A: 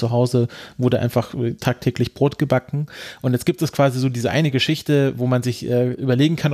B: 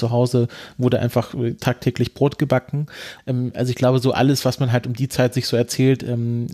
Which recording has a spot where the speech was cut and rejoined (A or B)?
B